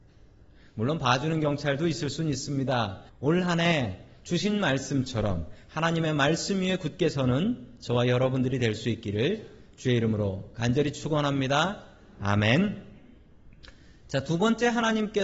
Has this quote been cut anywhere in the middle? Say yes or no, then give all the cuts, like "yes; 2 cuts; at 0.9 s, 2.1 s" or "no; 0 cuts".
yes; 1 cut; at 3.1 s